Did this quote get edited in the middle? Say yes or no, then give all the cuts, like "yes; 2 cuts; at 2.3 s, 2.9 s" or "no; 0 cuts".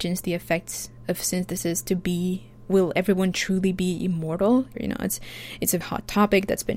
yes; 2 cuts; at 4.7 s, 5.8 s